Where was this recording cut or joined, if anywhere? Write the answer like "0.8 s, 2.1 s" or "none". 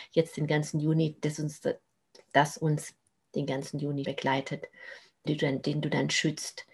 4.0 s, 5.3 s